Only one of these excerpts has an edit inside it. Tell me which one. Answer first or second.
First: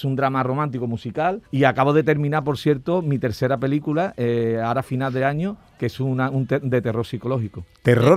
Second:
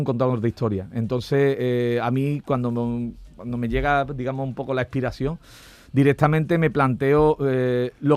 first